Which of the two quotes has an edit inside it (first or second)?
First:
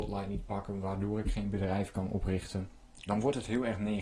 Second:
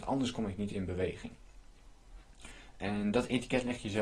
first